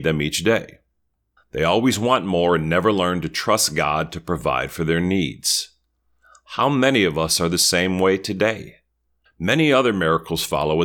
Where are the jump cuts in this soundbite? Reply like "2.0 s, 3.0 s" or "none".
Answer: 1.4 s, 9.3 s